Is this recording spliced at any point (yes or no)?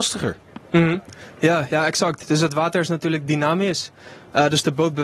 no